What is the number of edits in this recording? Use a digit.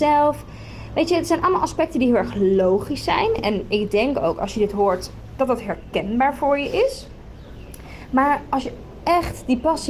1